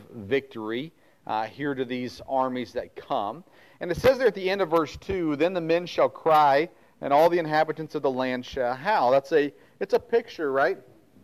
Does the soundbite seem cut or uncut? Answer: uncut